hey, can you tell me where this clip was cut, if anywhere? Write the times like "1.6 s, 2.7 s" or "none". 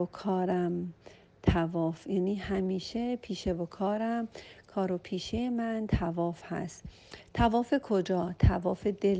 none